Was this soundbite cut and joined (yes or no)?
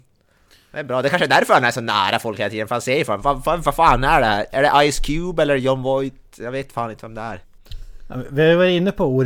no